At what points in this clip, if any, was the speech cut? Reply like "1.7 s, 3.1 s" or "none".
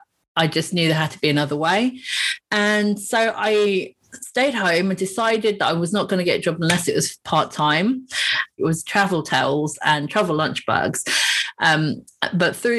8.6 s